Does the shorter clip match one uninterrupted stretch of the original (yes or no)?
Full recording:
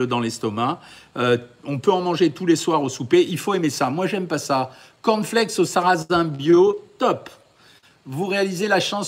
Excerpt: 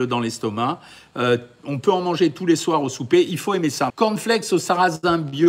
no